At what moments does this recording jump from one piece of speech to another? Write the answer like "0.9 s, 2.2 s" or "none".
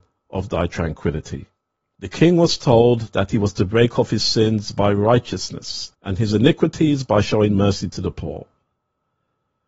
1.9 s, 5.9 s